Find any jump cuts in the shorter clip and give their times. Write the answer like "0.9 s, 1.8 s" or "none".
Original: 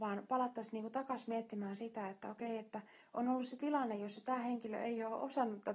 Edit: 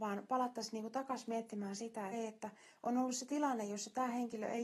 2.1 s